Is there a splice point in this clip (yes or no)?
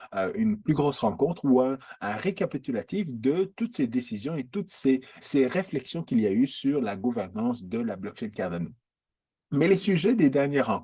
yes